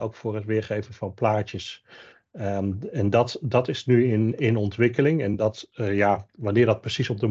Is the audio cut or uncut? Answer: uncut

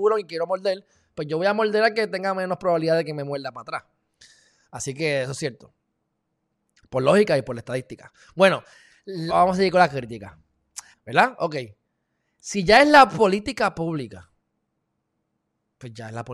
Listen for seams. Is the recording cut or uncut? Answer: cut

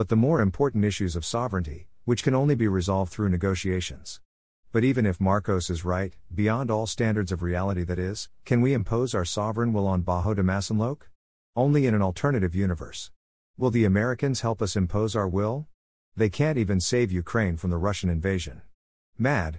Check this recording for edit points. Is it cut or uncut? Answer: uncut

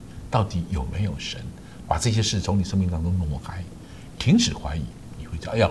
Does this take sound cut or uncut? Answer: uncut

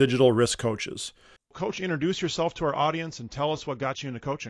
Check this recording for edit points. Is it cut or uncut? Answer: cut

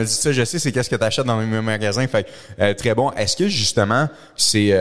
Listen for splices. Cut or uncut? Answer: uncut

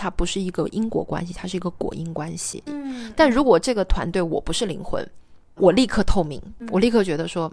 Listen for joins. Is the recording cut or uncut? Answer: cut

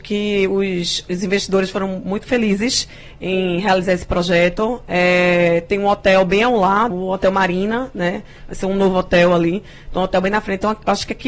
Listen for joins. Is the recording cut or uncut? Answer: cut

